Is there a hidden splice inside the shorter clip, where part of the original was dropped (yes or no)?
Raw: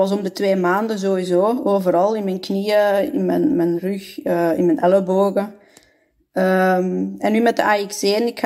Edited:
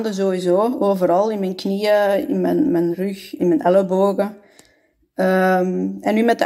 yes